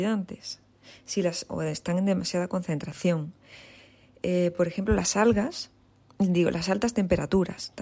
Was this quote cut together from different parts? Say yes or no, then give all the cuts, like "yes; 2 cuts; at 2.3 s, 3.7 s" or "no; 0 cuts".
no; 0 cuts